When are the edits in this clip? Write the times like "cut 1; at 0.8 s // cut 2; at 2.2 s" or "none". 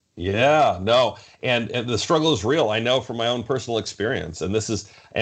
none